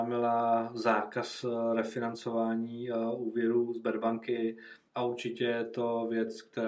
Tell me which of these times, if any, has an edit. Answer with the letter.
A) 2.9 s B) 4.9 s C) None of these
B